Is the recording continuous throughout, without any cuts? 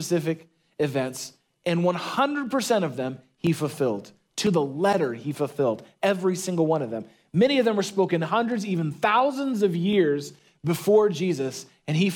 yes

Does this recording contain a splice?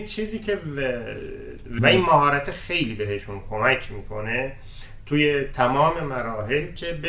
yes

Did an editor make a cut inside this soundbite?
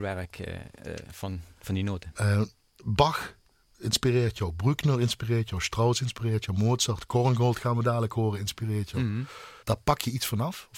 yes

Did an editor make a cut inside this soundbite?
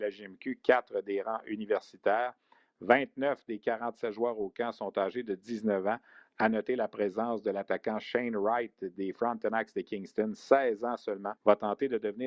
yes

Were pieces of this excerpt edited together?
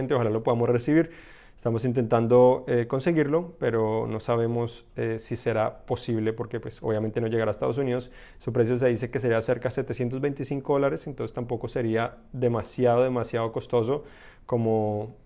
no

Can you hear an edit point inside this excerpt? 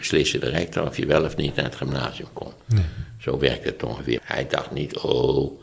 yes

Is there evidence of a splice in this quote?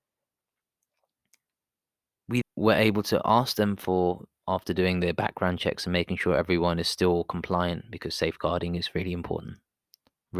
yes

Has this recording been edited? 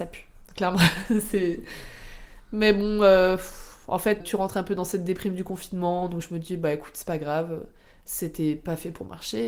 yes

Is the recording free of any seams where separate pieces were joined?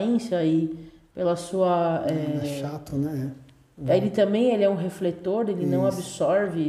yes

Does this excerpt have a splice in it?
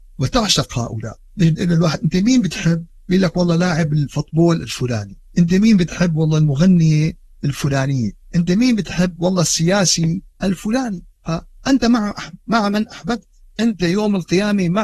no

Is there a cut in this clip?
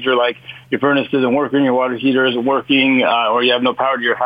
no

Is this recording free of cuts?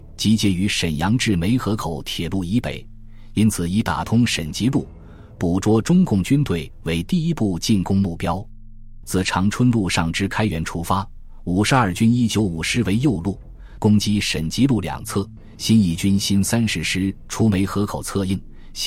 no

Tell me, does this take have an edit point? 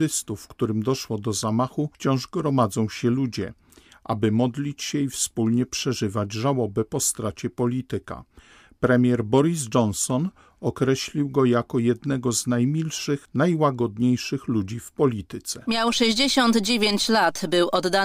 no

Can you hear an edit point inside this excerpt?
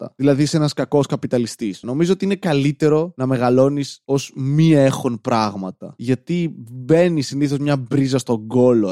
yes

